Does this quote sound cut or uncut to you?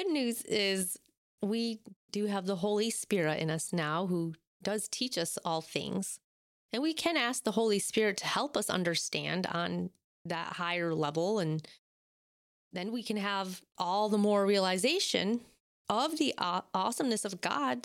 uncut